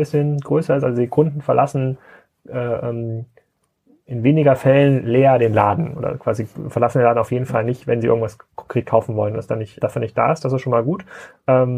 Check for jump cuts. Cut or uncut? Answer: cut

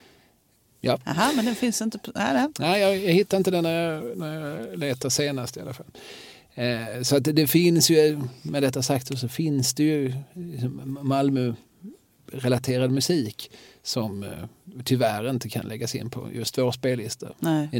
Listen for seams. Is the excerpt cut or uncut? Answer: uncut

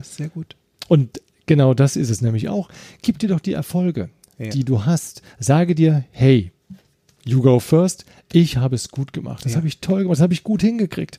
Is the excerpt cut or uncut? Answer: uncut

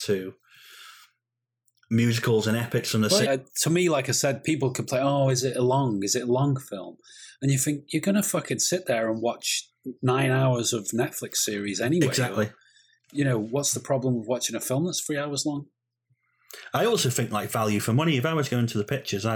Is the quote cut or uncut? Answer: cut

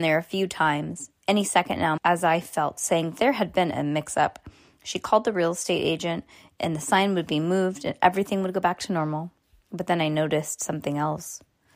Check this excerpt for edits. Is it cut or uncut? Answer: cut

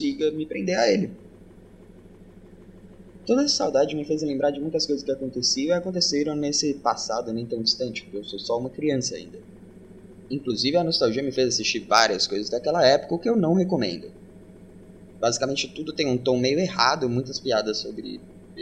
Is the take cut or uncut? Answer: uncut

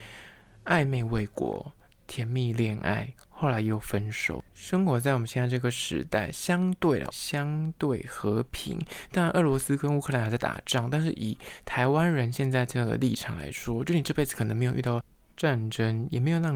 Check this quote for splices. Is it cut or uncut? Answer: cut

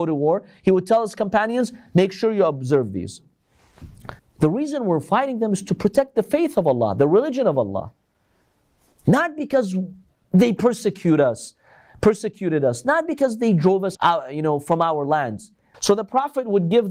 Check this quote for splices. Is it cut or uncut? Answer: cut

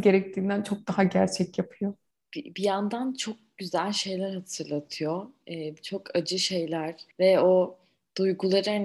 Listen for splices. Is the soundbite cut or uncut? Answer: cut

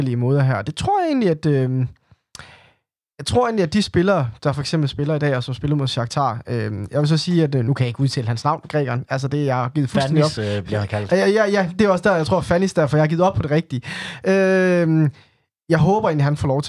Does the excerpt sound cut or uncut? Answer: uncut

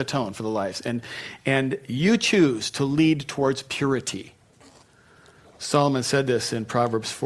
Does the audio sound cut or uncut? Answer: uncut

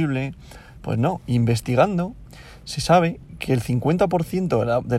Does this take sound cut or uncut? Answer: uncut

